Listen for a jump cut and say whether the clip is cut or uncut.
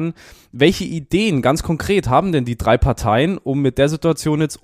uncut